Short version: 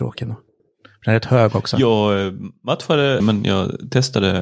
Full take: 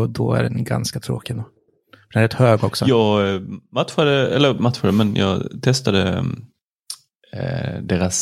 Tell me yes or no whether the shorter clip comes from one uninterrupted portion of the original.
no